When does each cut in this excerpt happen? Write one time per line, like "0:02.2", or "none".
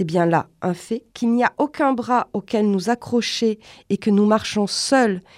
0:01.1